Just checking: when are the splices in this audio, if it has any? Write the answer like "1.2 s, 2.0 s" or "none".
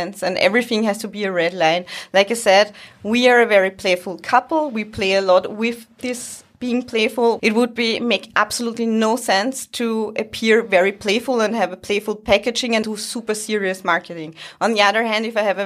7.4 s, 12.8 s